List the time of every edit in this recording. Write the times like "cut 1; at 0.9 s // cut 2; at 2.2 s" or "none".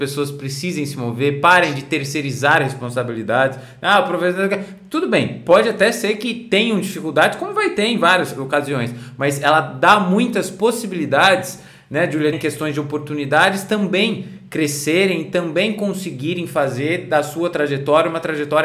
cut 1; at 12.3 s